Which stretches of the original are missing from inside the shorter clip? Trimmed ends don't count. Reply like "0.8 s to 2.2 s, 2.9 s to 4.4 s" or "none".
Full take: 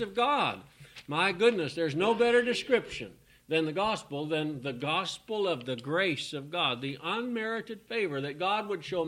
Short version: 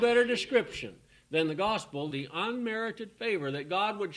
4.3 s to 6.8 s